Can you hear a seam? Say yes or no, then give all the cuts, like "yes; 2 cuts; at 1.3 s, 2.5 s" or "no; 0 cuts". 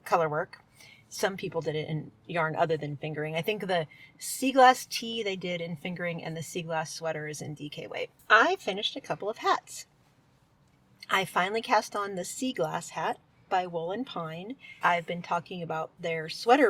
yes; 2 cuts; at 8.2 s, 14.8 s